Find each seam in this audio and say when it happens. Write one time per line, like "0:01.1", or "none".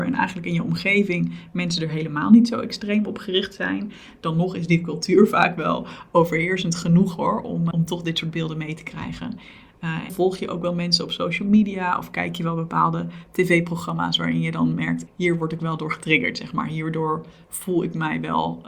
0:07.7
0:10.1
0:15.1